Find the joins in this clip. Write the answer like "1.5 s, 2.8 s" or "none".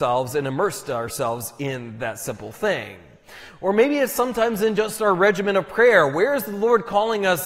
none

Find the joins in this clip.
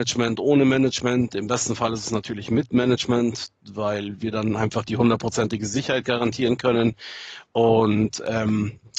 none

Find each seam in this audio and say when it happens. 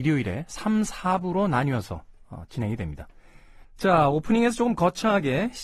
3.6 s

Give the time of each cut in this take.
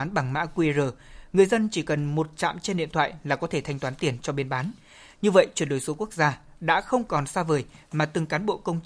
none

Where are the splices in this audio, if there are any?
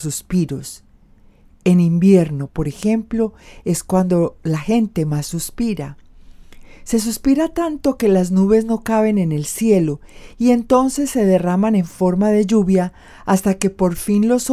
none

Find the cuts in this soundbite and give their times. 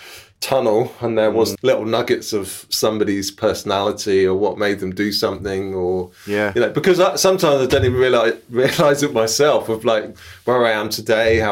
1.5 s

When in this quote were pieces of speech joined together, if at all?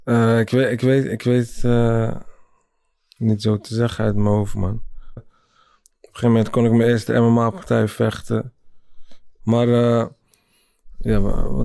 5.2 s, 9.4 s

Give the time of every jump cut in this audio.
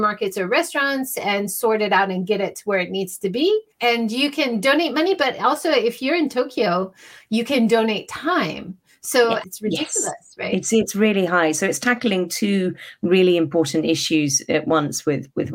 3.7 s, 9.4 s

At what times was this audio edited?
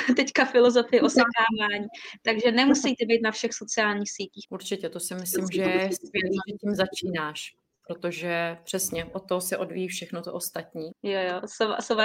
4.4 s, 10.9 s

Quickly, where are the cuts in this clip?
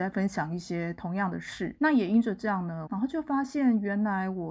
2.9 s

